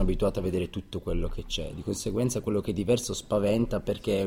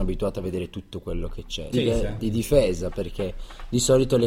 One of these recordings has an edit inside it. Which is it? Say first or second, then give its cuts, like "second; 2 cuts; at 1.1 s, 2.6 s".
second; 1 cut; at 1.7 s